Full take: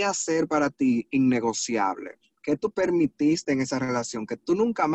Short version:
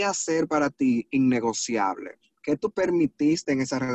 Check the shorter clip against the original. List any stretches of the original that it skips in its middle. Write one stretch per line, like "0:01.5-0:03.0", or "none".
none

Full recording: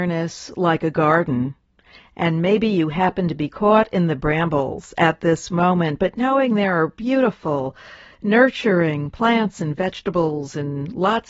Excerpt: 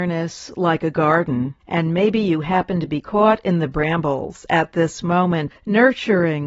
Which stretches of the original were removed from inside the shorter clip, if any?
0:01.6-0:02.1
0:06.0-0:08.1

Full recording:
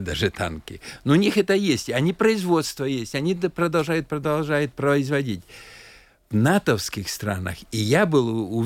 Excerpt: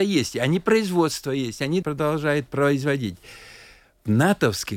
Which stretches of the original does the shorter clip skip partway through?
0:03.4-0:04.1

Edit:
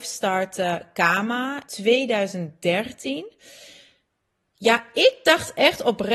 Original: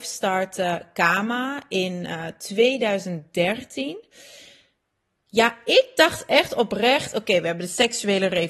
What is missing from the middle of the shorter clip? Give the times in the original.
0:01.6-0:02.4

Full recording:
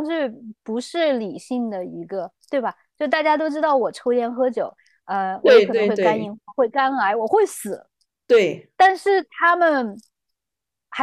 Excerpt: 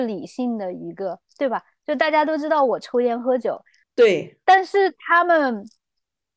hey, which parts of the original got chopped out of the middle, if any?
0:05.0-0:08.2

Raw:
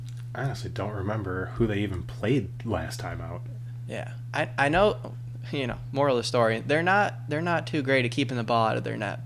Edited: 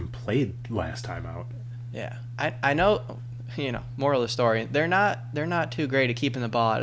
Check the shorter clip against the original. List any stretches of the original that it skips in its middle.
none

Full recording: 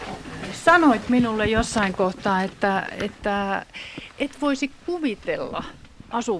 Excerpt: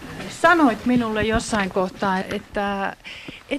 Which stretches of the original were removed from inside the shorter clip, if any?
0:02.4-0:02.9

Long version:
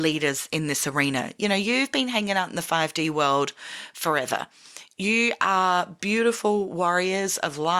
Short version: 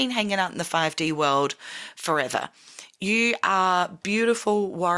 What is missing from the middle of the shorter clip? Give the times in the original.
none

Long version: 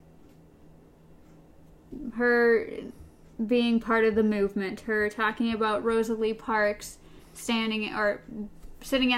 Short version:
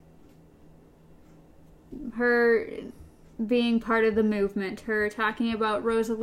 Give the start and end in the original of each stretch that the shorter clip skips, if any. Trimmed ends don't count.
none

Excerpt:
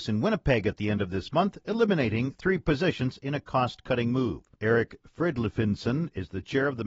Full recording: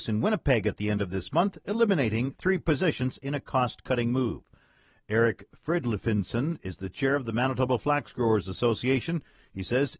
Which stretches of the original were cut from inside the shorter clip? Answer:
0:04.5-0:05.0

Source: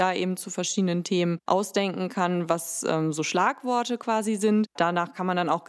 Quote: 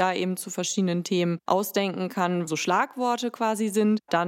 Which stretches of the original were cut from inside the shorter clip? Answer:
0:02.5-0:03.1

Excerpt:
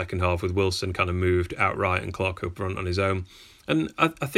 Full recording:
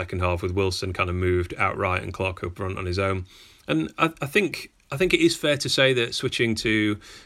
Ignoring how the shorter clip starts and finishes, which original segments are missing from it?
none

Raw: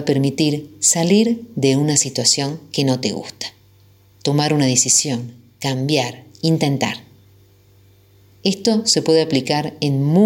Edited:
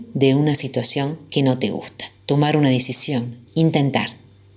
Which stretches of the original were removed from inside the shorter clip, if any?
0:03.6-0:04.2
0:05.4-0:06.3

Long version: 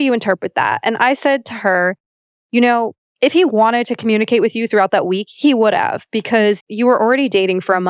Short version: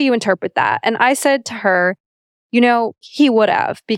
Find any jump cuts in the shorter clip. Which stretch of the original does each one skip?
0:03.0-0:05.3

